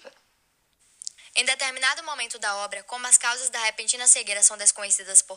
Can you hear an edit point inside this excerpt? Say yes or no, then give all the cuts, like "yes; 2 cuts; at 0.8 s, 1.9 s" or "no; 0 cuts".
yes; 1 cut; at 1.2 s